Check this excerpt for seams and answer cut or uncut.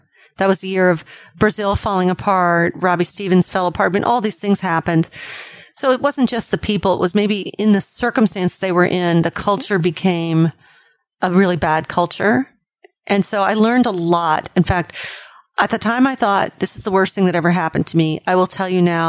uncut